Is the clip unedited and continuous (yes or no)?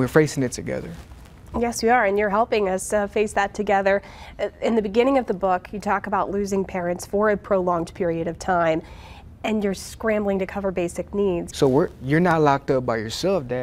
no